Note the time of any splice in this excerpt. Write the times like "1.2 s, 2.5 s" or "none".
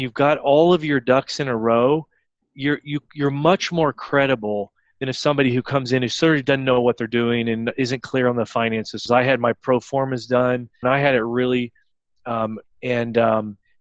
9.1 s, 10.8 s, 12.6 s

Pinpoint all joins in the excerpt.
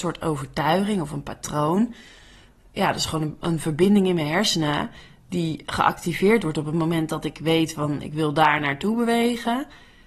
none

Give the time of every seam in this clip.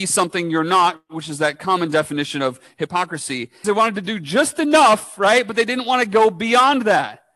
3.6 s

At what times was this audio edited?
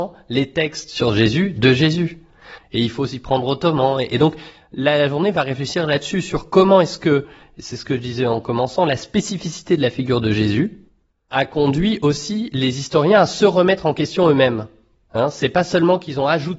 2.6 s

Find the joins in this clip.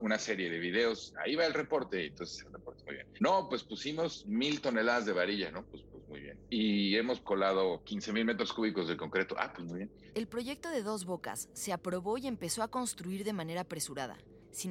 none

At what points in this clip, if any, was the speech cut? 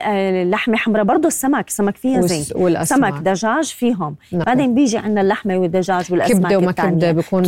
4.4 s

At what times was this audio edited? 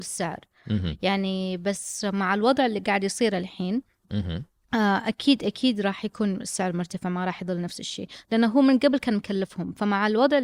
none

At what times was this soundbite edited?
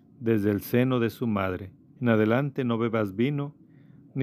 2.0 s

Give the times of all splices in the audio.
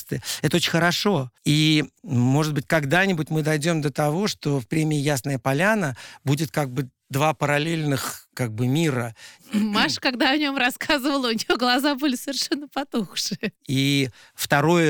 1.4 s, 9.4 s, 13.6 s

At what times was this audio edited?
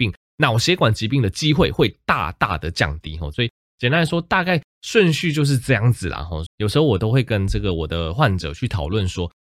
3.3 s, 6.5 s

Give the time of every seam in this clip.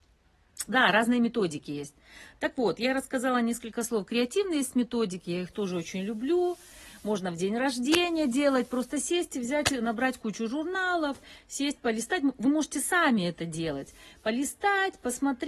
none

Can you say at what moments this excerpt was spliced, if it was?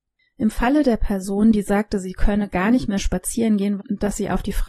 3.8 s

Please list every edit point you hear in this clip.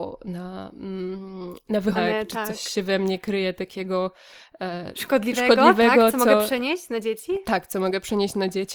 2.0 s

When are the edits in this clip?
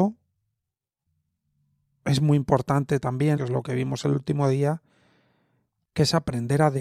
3.4 s

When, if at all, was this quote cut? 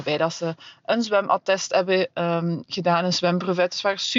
none

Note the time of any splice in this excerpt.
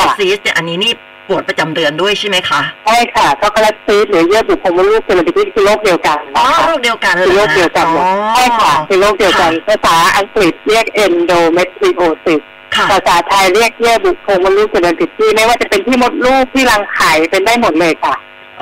2.8 s

